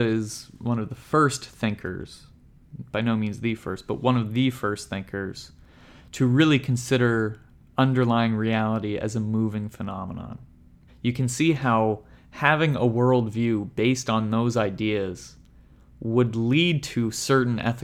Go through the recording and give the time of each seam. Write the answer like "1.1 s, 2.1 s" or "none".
10.9 s